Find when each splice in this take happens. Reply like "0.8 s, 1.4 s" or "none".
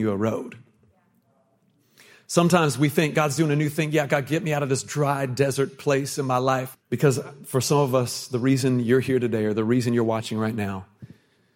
6.7 s